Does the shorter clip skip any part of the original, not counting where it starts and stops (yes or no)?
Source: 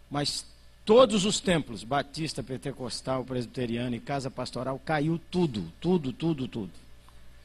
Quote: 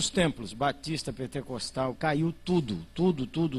yes